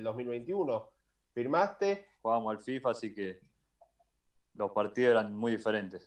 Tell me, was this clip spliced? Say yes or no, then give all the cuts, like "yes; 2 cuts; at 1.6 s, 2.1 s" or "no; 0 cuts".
yes; 1 cut; at 2.2 s